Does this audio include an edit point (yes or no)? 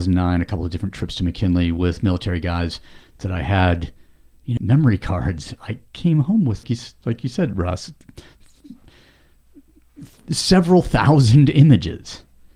yes